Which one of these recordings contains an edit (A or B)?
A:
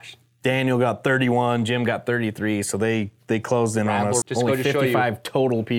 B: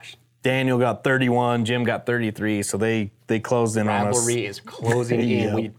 A